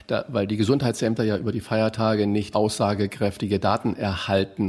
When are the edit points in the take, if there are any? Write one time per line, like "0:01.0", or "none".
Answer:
0:02.5